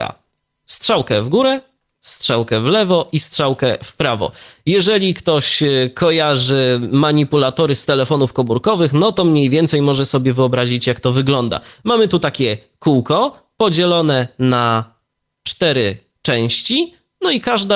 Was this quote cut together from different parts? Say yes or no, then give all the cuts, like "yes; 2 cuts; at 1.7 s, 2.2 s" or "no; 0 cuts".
yes; 1 cut; at 1.9 s